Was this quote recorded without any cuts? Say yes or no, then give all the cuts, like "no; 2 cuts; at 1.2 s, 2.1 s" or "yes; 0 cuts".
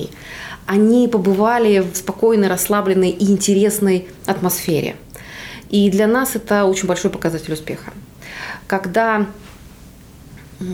no; 1 cut; at 1.9 s